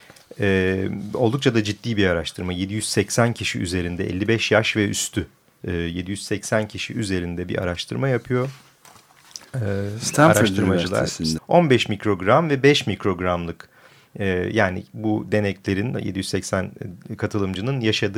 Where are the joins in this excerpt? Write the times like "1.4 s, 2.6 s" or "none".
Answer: 11.4 s